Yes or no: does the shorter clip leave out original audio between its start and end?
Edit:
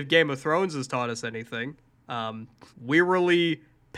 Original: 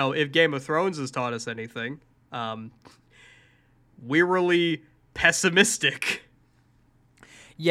yes